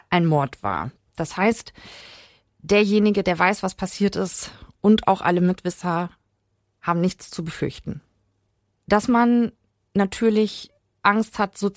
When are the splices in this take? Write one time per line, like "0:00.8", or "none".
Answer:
0:01.0